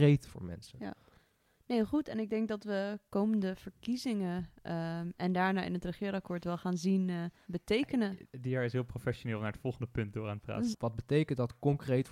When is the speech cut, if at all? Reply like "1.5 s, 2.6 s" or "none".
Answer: 7.4 s, 10.7 s